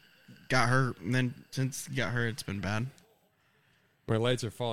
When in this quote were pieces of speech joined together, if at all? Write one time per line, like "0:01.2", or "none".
none